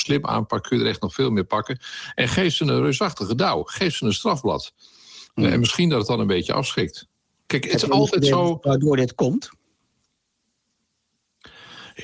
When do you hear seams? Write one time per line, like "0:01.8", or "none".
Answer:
none